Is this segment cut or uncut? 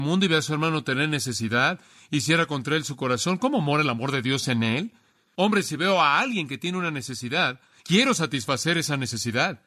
uncut